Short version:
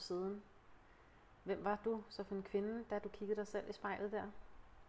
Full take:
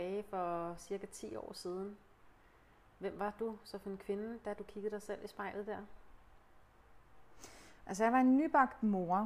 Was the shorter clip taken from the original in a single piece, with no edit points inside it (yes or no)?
yes